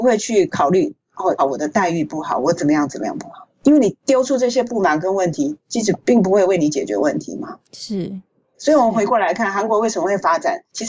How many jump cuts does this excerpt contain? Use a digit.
2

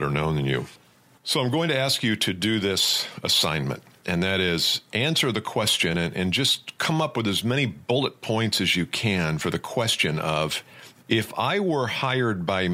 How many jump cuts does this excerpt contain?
0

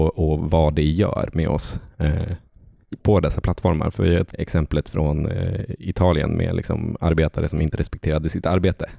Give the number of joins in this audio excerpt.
2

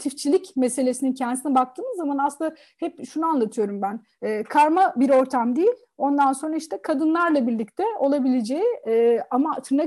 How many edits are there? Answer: 1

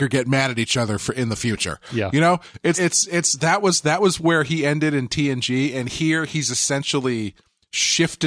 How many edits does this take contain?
1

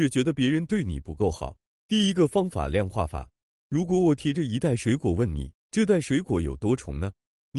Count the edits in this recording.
1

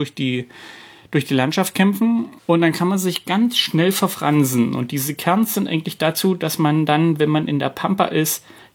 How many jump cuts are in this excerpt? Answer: 1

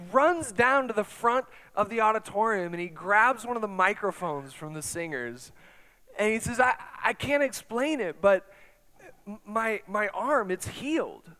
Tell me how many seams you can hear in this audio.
0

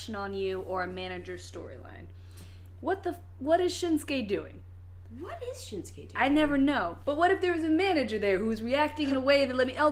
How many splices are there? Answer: 1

